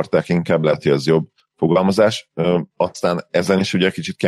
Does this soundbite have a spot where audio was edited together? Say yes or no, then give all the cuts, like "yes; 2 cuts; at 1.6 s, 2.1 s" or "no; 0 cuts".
no; 0 cuts